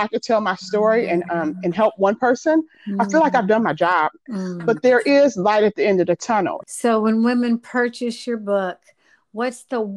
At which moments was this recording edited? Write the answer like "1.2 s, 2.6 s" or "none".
4.3 s, 6.6 s